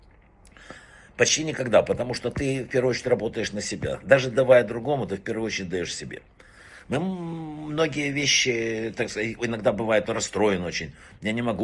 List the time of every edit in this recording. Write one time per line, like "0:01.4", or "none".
0:10.0

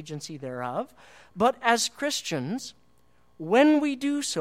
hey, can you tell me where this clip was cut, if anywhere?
none

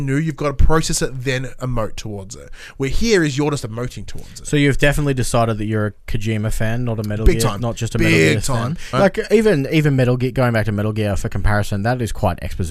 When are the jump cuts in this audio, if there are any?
0:08.9

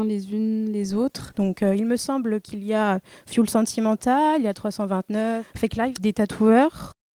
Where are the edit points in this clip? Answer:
0:01.3
0:06.0

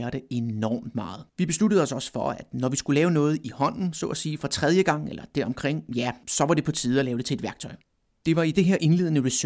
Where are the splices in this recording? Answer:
0:01.3
0:08.1

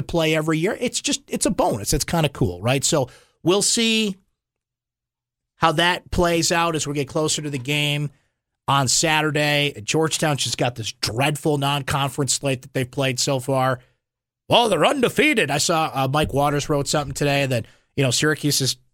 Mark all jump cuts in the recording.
none

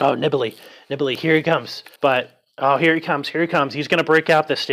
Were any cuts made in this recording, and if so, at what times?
0:02.0

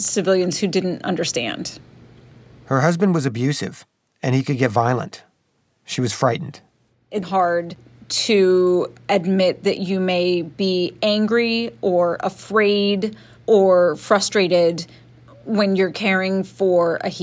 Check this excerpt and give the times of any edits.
0:07.2

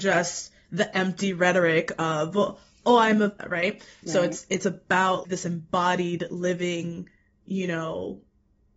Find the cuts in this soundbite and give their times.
0:03.4
0:05.2

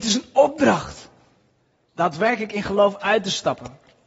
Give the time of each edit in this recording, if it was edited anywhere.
0:01.7

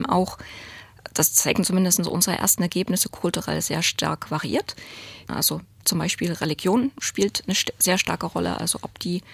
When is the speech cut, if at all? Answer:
0:05.3

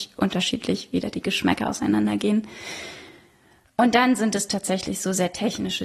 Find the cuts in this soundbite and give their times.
none

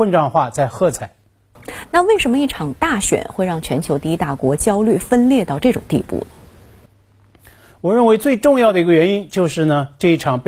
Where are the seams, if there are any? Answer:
none

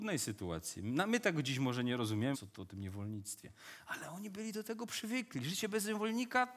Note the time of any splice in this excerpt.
0:02.3

